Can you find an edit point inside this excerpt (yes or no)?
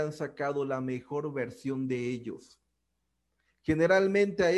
no